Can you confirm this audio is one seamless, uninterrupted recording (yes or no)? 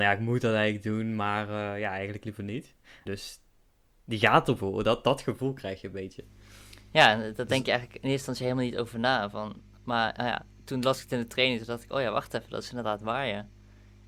no